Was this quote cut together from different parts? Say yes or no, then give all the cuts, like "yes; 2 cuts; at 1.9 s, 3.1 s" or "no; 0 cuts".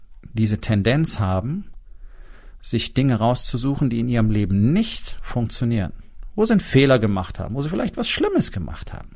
no; 0 cuts